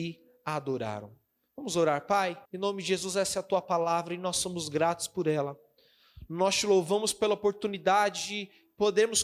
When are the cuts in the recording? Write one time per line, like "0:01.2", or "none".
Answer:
0:02.5